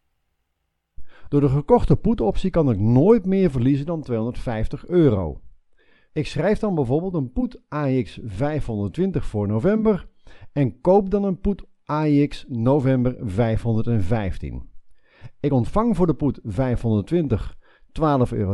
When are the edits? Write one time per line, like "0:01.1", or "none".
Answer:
0:01.3
0:06.1